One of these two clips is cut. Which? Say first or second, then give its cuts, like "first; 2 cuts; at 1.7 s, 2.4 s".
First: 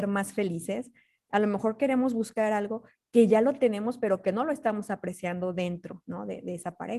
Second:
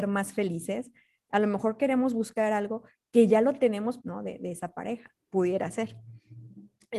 second; 1 cut; at 4.0 s